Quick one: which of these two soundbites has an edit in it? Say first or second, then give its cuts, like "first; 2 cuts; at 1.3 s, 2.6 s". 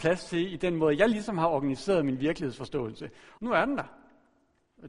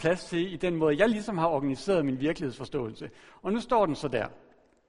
first; 1 cut; at 3.4 s